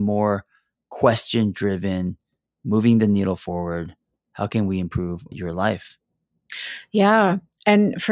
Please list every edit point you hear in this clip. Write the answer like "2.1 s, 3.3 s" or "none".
5.3 s